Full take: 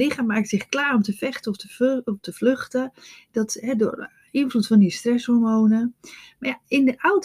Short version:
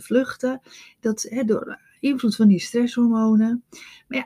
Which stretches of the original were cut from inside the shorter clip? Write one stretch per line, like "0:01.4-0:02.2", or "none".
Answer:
none